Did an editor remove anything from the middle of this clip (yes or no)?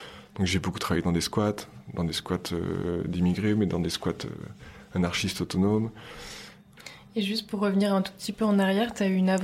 no